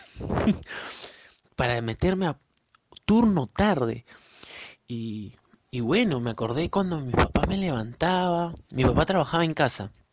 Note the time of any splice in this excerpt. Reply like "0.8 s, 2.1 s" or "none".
4.8 s